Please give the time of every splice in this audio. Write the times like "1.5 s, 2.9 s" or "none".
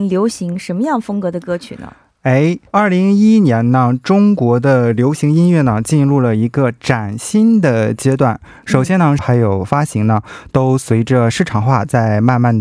2.7 s, 9.2 s